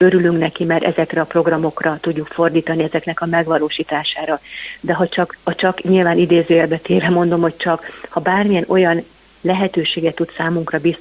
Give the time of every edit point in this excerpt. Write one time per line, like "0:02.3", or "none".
none